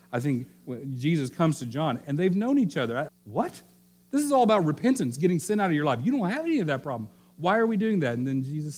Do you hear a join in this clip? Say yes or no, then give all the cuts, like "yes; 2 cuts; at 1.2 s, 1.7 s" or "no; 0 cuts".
yes; 1 cut; at 3.1 s